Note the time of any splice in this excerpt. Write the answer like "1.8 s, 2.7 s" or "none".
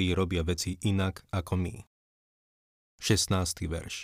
none